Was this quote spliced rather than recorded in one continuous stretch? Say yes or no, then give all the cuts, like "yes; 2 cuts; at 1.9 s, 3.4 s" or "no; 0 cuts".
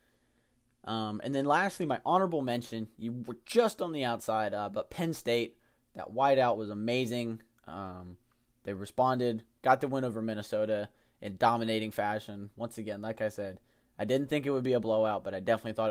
no; 0 cuts